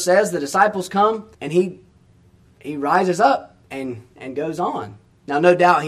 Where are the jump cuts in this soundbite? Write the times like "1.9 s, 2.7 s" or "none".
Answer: 1.3 s, 3.6 s